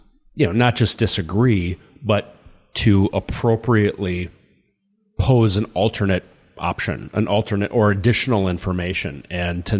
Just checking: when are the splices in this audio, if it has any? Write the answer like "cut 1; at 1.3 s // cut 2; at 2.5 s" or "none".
none